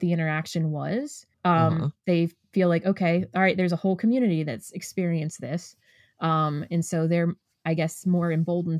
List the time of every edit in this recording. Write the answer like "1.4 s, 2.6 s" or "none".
1.3 s